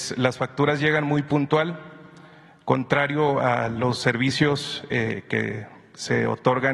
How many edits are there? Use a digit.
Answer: 0